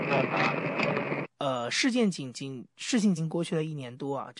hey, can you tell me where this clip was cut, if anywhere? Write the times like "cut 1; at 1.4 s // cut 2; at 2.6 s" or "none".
cut 1; at 1.2 s // cut 2; at 3.2 s